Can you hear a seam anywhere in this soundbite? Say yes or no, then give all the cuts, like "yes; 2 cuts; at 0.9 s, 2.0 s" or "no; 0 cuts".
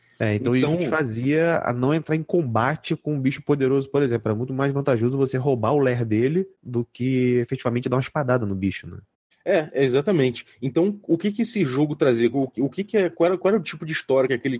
yes; 1 cut; at 6.5 s